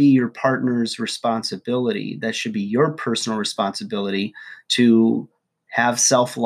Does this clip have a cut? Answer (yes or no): no